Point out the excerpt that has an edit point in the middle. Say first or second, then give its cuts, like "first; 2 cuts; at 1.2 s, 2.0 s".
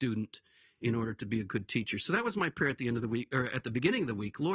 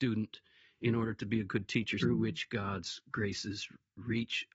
second; 1 cut; at 2.0 s